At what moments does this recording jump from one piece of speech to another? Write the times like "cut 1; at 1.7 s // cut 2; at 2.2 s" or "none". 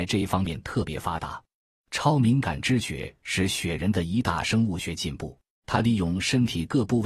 cut 1; at 1.7 s // cut 2; at 5.6 s

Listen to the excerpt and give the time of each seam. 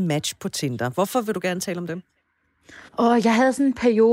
cut 1; at 2.9 s

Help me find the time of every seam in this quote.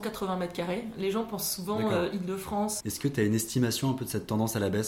cut 1; at 2.8 s

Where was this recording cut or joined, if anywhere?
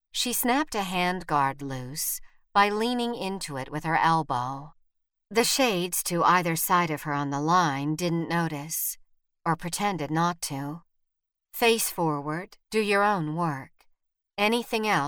cut 1; at 12.6 s

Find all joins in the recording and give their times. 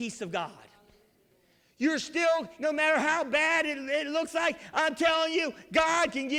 cut 1; at 2.6 s

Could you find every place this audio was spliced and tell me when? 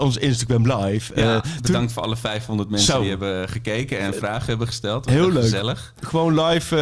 none

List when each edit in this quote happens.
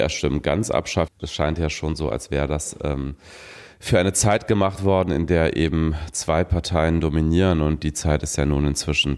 cut 1; at 1.1 s

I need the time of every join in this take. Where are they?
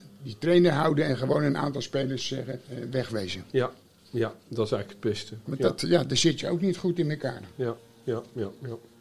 none

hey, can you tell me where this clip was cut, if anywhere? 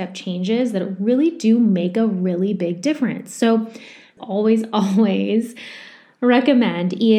cut 1; at 4.2 s

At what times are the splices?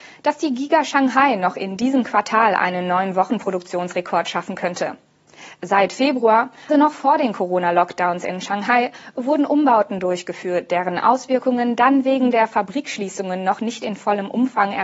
cut 1; at 6.7 s

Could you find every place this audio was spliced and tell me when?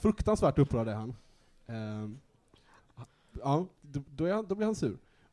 none

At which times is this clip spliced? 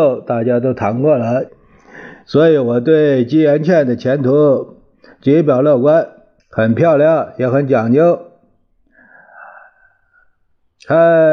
cut 1; at 1.5 s // cut 2; at 6.4 s

